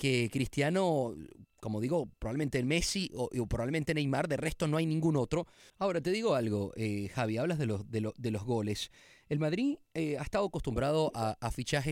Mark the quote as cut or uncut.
cut